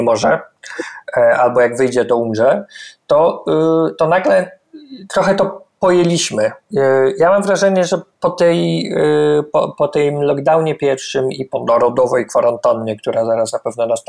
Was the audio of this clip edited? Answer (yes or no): no